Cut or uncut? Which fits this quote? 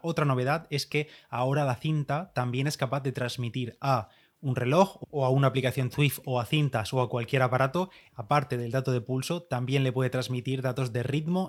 cut